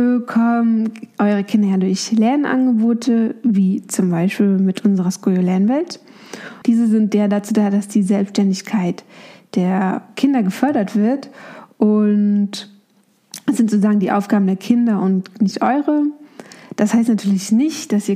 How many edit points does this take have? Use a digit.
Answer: 1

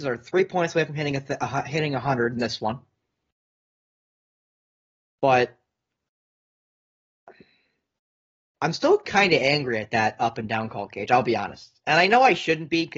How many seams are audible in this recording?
0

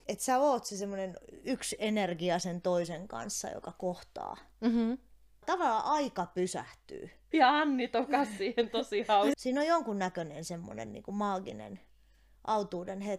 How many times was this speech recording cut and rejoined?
2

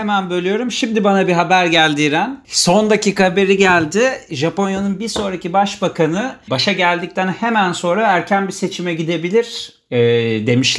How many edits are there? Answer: 1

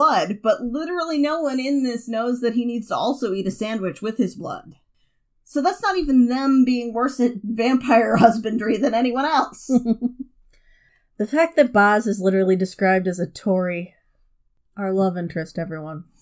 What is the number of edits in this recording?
0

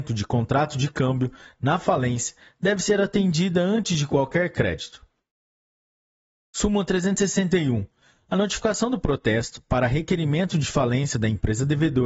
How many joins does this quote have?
0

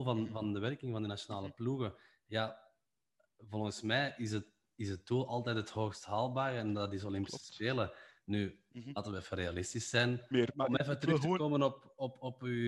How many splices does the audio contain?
1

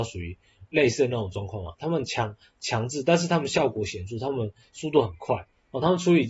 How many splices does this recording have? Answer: 0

